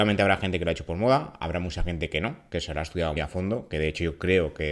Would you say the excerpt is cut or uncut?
cut